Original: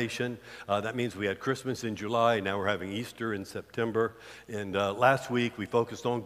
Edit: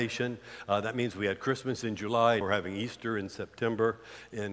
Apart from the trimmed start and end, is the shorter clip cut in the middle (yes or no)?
yes